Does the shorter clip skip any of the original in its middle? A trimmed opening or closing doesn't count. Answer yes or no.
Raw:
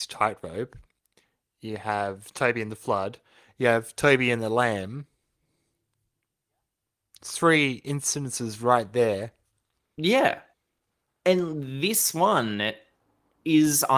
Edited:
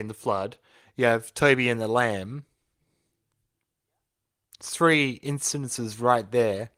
no